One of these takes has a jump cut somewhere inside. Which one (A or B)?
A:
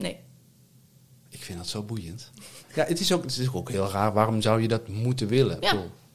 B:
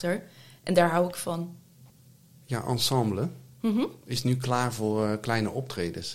A